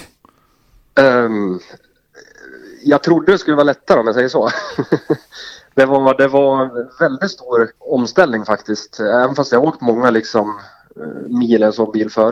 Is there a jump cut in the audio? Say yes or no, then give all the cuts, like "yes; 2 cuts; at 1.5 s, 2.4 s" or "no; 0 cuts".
yes; 1 cut; at 7.8 s